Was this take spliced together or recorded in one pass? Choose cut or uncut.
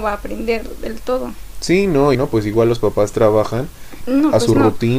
cut